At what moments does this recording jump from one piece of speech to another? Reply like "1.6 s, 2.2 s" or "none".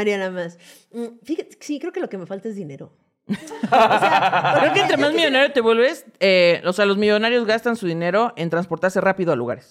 none